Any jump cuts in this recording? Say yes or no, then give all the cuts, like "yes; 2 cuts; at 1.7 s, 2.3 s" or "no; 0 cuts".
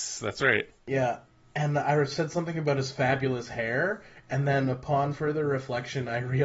no; 0 cuts